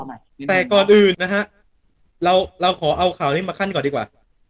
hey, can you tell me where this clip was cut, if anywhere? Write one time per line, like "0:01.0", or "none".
0:01.1